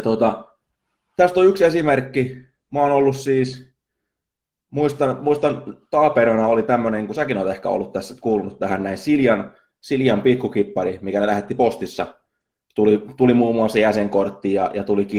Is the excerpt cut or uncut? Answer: uncut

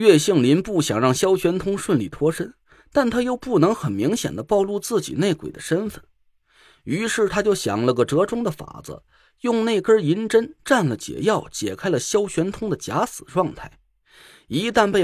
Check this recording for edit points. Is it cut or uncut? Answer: uncut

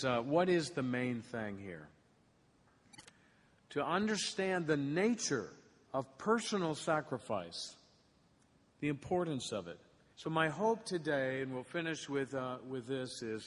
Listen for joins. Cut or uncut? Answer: cut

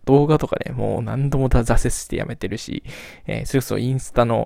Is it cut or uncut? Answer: uncut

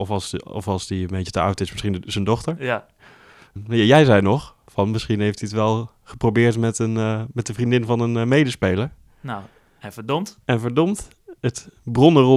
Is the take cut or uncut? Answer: uncut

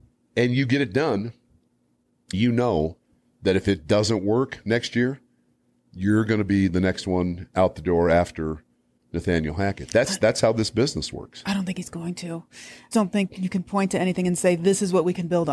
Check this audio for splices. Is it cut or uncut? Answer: cut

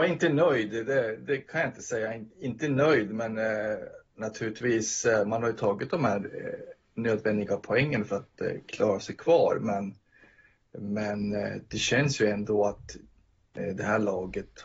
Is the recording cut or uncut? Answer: uncut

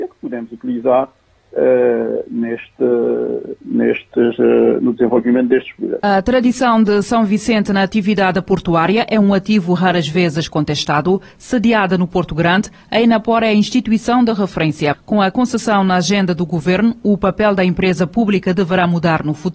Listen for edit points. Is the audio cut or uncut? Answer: uncut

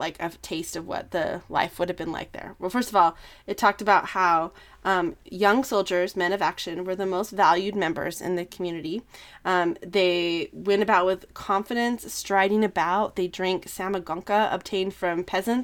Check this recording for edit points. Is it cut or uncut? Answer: uncut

